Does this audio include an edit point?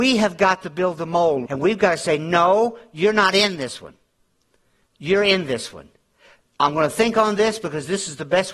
yes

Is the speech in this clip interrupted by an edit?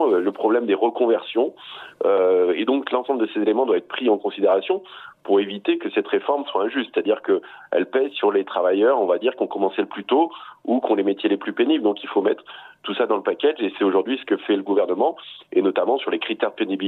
no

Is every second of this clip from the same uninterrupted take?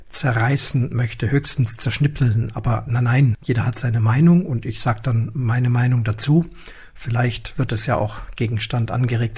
no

